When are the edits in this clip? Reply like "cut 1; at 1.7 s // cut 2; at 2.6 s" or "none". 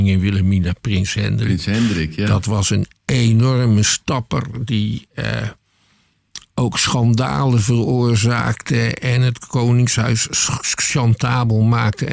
none